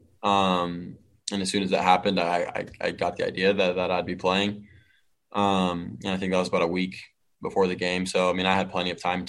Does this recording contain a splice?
no; 0 cuts

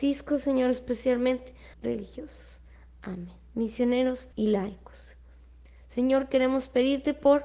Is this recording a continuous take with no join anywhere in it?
no; 2 cuts; at 1.7 s, 4.3 s

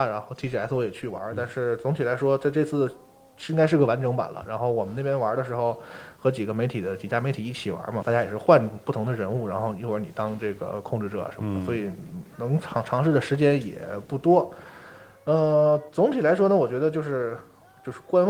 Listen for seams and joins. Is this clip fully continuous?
no; 1 cut; at 8.0 s

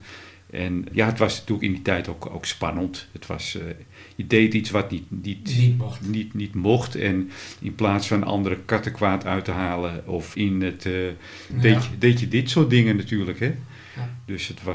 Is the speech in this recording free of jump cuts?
no; 3 cuts; at 0.9 s, 10.3 s, 11.5 s

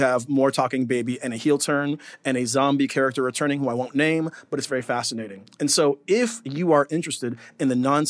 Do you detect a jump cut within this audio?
no; 0 cuts

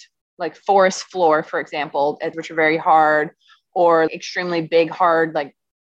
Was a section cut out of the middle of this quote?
yes; 2 cuts; at 2.3 s, 4.1 s

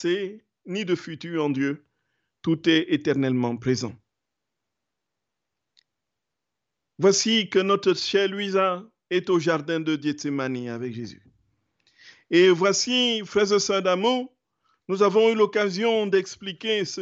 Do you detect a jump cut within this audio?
no; 0 cuts

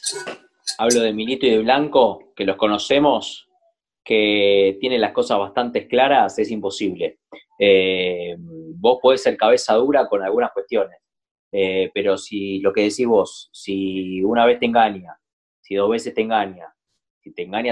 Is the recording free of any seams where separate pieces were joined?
yes; 0 cuts

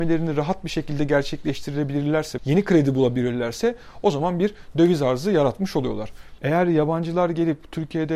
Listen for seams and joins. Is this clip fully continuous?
no; 2 cuts; at 2.4 s, 6.4 s

